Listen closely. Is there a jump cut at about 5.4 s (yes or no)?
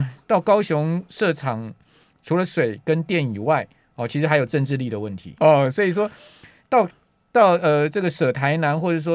yes